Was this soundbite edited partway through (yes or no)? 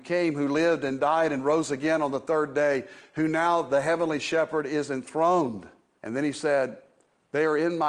yes